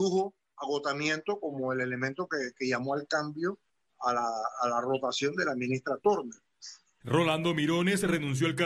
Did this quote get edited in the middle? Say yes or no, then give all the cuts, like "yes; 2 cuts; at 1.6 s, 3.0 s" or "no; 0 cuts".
yes; 1 cut; at 7.0 s